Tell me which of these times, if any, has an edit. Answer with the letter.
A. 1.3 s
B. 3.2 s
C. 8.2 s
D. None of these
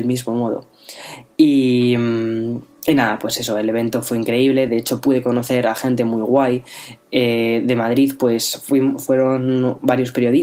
D